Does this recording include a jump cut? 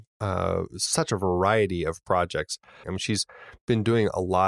yes; 1 cut; at 2.8 s

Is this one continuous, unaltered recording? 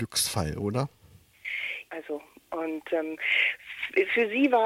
no; 1 cut; at 1.9 s

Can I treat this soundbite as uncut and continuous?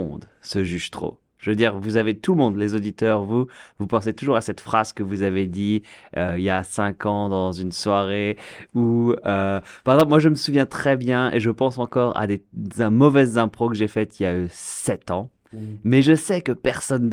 yes; 0 cuts

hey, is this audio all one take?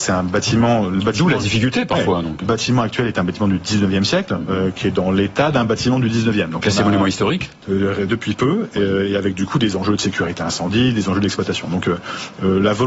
yes; 0 cuts

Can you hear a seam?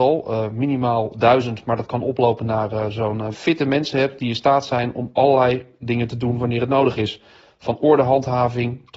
yes; 1 cut; at 3.3 s

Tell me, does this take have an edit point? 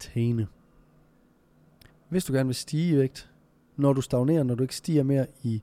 yes; 1 cut; at 1.9 s

